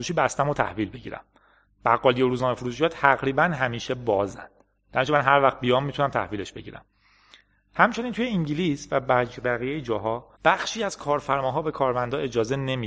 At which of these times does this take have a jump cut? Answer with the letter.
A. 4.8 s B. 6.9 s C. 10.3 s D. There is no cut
C